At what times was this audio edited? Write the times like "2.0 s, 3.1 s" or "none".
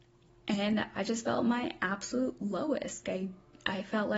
3.0 s